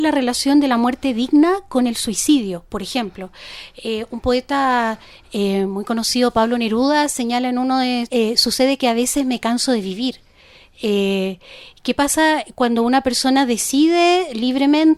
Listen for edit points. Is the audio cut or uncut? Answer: cut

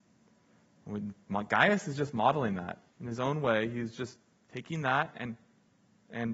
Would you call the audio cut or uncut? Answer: cut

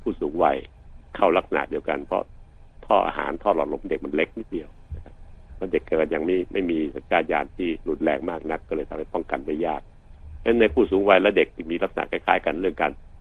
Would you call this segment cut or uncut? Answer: uncut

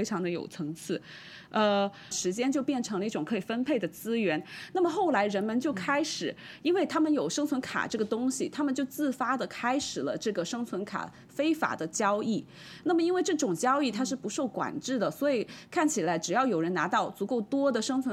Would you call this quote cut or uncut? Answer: cut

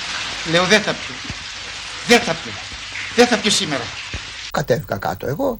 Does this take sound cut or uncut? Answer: cut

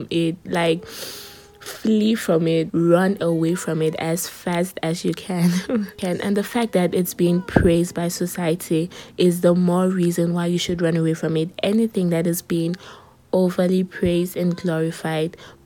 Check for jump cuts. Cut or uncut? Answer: cut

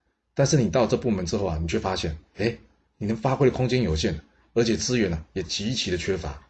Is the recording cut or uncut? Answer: uncut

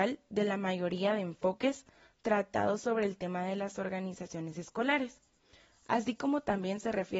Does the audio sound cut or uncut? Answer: uncut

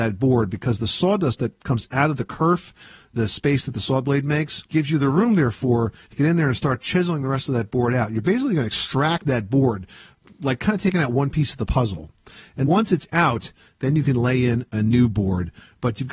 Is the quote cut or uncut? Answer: cut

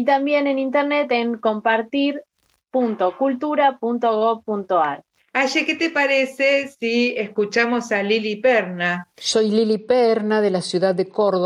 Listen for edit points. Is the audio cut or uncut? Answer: cut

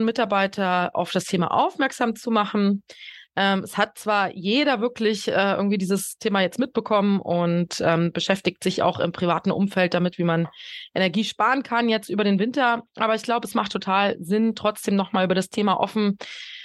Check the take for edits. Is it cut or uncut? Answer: uncut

